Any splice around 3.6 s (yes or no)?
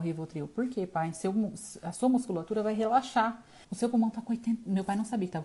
yes